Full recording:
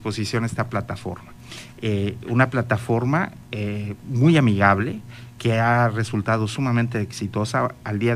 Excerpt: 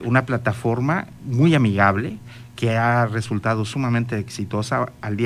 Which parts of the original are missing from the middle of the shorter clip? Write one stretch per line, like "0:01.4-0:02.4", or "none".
0:03.4-0:04.0